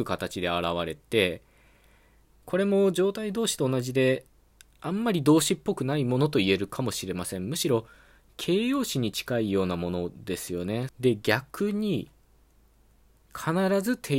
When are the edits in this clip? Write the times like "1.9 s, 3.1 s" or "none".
10.9 s